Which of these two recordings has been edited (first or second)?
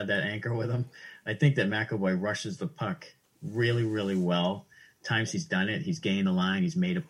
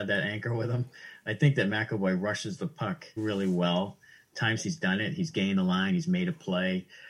second